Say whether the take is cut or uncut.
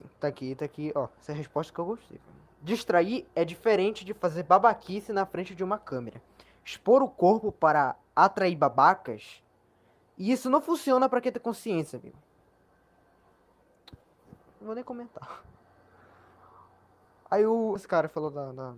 cut